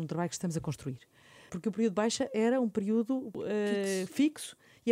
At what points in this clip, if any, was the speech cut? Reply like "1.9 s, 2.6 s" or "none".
1.5 s

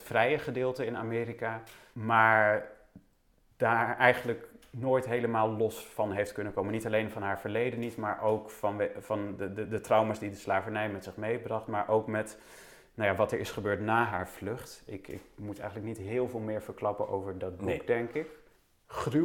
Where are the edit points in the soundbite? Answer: none

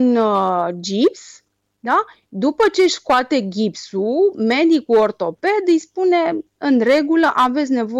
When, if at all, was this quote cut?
none

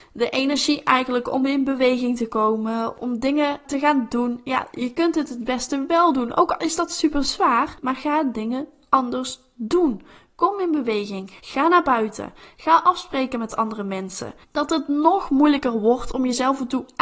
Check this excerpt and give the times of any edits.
11.4 s, 14.4 s

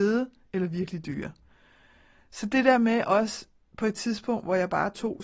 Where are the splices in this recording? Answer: none

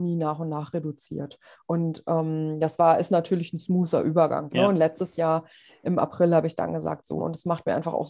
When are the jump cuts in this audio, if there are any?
1.5 s, 4.5 s, 7.2 s

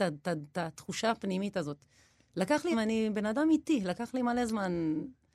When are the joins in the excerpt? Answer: 2.7 s

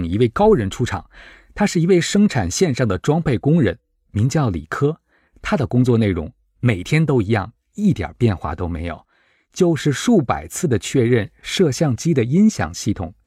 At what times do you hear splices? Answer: none

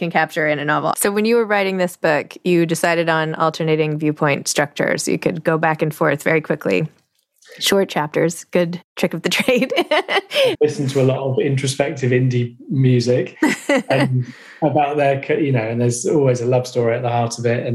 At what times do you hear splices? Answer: 0.9 s, 10.5 s

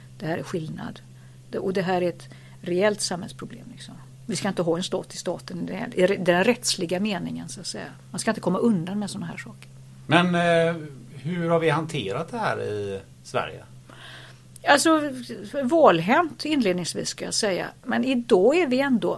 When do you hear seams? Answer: none

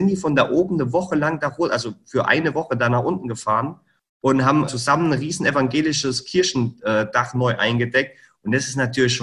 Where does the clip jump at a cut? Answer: 4.7 s

